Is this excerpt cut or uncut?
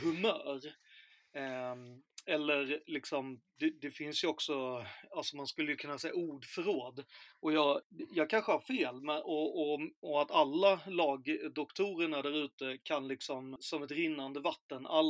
cut